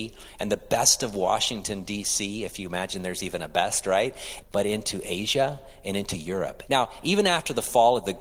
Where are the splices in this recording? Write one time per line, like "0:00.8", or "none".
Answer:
0:04.4
0:06.7